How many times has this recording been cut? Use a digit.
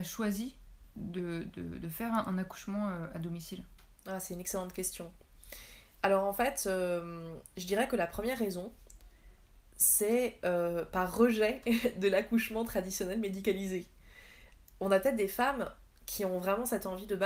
0